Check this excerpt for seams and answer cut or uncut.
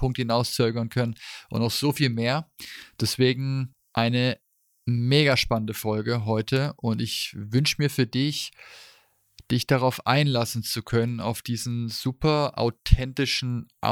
uncut